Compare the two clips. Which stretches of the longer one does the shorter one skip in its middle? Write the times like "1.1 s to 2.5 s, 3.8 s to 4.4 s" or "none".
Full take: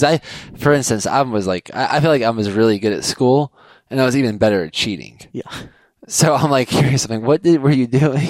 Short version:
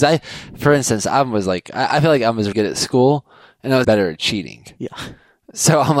2.5 s to 2.8 s, 4.1 s to 4.4 s